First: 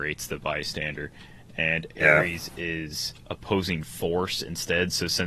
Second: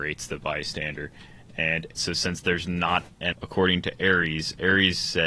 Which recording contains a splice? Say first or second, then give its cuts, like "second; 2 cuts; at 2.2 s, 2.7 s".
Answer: second; 2 cuts; at 2.0 s, 3.3 s